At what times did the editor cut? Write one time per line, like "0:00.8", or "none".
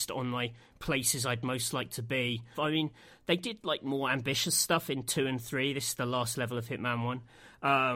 0:02.5